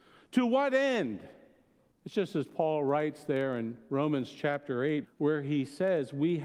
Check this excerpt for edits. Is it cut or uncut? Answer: cut